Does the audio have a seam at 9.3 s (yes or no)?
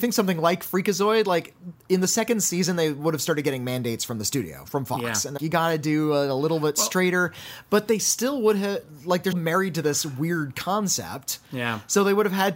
yes